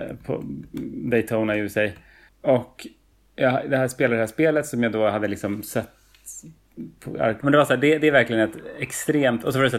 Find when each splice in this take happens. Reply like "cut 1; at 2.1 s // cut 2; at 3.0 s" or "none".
cut 1; at 2.3 s // cut 2; at 7.4 s